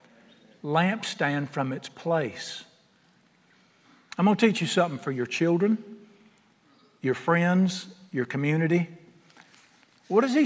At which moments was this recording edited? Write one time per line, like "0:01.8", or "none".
none